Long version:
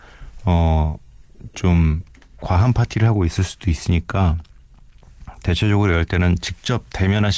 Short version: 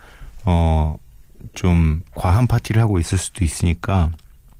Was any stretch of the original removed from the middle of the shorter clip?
yes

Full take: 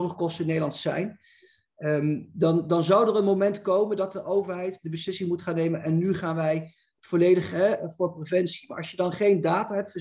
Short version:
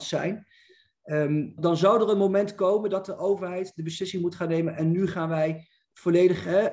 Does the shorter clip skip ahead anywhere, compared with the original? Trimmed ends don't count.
yes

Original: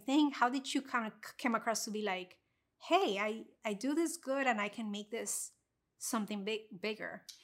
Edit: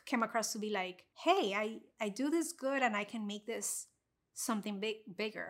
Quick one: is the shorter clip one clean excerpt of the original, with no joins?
no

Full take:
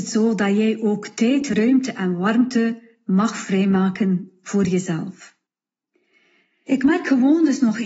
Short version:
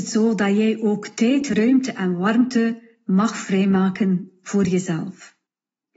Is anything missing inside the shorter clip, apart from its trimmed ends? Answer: no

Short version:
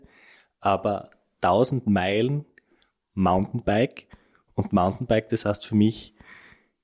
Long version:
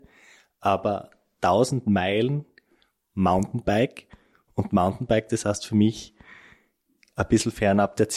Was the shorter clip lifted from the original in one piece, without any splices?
yes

